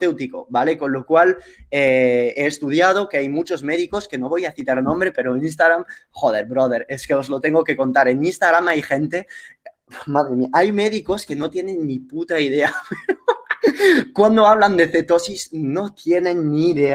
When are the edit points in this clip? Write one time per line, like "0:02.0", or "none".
none